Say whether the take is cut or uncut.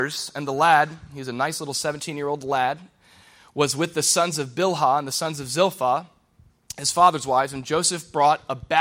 uncut